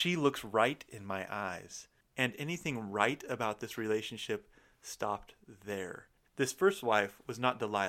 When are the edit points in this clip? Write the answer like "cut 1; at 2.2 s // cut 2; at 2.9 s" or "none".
cut 1; at 6.2 s